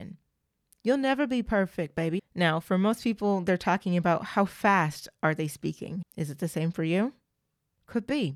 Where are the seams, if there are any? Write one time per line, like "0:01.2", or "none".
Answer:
0:02.2
0:06.0